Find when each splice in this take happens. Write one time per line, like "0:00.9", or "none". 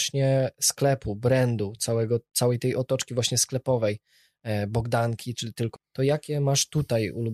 0:05.8